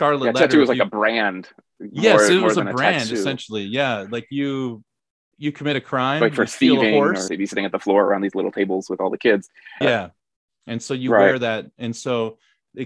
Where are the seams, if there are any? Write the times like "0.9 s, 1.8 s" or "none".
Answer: 7.3 s, 9.8 s